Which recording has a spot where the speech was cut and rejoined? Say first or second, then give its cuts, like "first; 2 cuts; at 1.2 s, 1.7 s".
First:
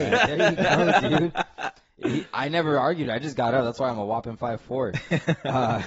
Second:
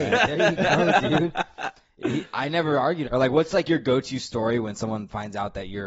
second; 1 cut; at 3.0 s